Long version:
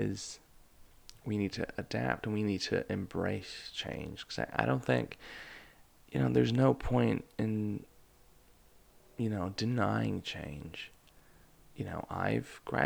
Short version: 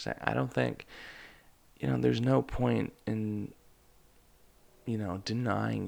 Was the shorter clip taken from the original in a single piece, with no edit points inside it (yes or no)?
yes